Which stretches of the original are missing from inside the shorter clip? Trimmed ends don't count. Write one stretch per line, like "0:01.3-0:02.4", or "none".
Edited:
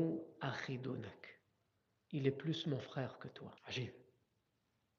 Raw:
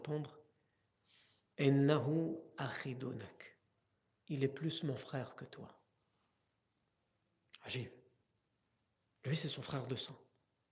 0:05.7-0:07.6

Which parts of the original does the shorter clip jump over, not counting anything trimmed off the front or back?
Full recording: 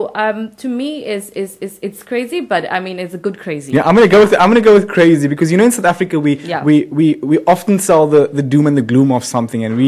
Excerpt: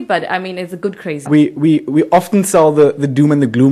0:03.7-0:06.6

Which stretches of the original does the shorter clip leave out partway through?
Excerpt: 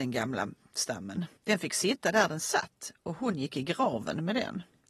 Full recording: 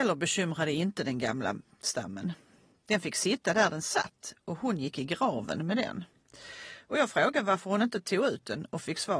0:02.4-0:02.8

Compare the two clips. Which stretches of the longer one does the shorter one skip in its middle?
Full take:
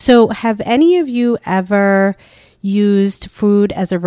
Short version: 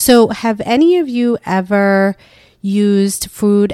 none

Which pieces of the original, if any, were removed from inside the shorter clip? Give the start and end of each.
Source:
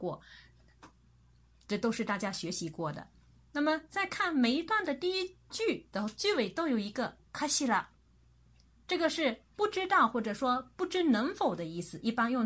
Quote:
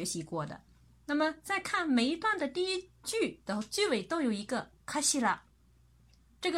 none

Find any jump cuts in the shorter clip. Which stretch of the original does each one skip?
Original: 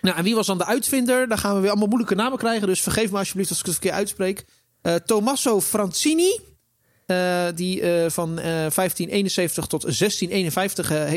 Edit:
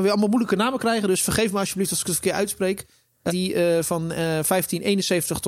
0:04.9-0:07.6

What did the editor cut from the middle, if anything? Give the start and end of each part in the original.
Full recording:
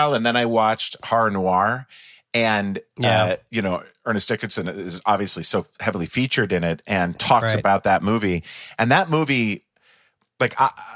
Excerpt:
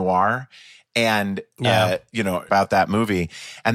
0:03.9-0:07.6

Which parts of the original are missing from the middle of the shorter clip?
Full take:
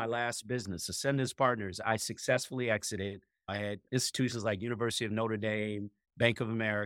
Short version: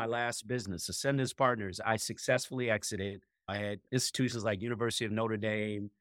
none

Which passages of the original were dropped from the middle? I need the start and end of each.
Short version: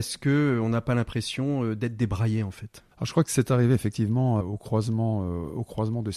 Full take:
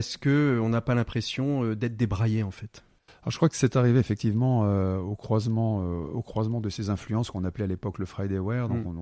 0:02.9-0:03.2
0:04.7-0:05.0

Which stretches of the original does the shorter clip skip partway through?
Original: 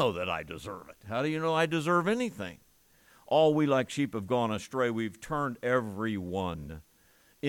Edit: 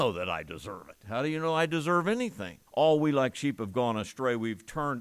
0:02.7-0:03.2

